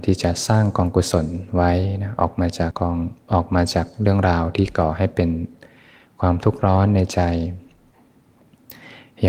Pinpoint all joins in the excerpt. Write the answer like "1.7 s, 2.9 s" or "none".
2.7 s